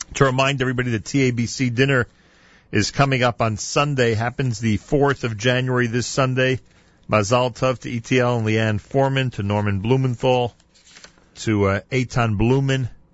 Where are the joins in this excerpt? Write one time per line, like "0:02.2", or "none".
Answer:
0:11.3